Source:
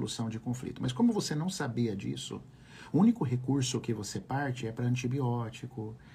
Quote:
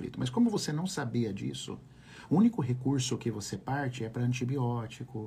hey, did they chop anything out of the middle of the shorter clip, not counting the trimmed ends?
no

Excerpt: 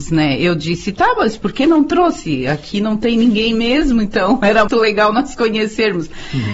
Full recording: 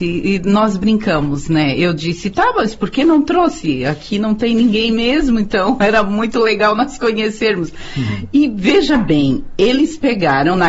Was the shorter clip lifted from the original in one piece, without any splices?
no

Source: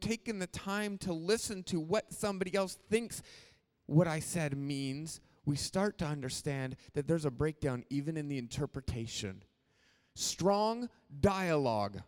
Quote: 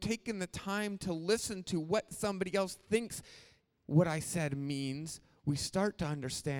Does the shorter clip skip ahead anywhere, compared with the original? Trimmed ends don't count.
no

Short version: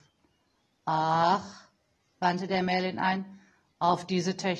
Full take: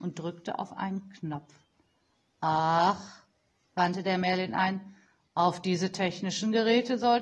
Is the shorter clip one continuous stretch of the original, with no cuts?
yes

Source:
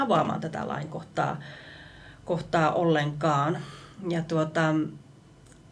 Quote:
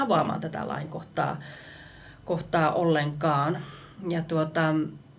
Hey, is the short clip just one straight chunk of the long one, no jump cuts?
yes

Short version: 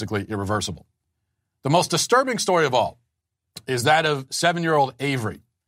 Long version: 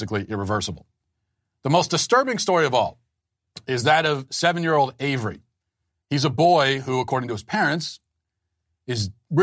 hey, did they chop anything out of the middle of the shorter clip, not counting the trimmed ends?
no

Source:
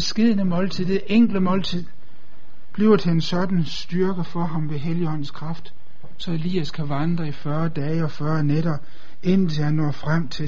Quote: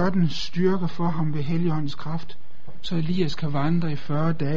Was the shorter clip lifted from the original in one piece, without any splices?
yes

